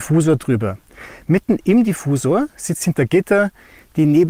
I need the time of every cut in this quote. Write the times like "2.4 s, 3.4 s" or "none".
none